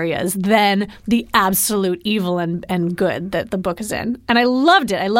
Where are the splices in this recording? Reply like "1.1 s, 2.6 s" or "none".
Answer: none